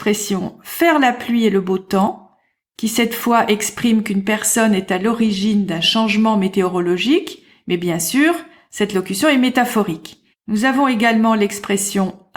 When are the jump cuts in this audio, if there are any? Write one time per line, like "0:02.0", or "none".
0:10.3